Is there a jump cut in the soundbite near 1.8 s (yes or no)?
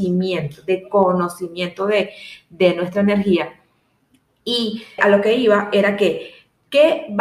no